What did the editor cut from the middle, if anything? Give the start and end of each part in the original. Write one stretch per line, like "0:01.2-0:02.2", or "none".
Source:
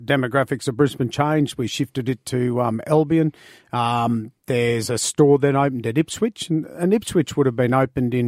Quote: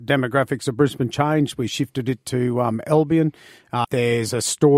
0:03.8-0:04.4